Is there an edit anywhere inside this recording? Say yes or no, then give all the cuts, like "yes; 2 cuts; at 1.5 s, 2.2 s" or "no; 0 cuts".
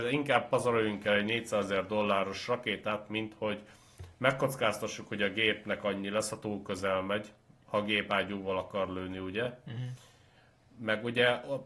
no; 0 cuts